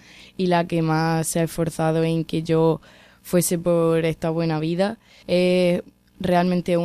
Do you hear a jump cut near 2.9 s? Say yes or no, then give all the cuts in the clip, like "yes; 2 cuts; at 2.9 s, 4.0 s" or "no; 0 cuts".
no; 1 cut; at 5.2 s